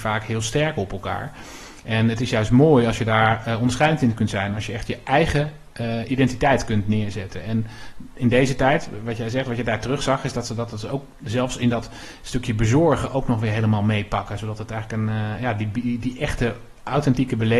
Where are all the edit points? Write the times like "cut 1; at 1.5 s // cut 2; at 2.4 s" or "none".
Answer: none

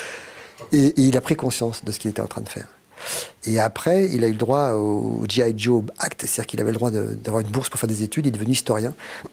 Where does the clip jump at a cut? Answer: none

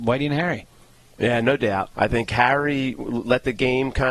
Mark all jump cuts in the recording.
cut 1; at 1.9 s

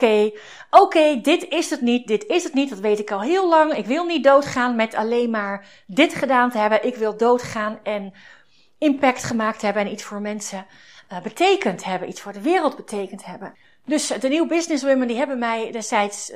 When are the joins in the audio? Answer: none

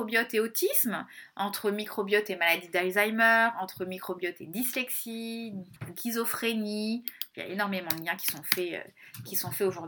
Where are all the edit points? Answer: cut 1; at 5.9 s

